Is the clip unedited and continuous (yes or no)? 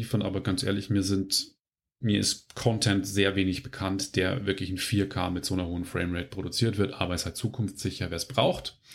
yes